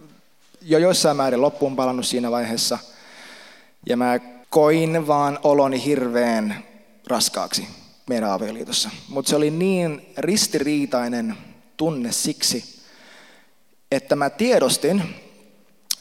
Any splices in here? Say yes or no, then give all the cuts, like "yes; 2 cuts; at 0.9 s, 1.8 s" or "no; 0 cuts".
yes; 1 cut; at 4.4 s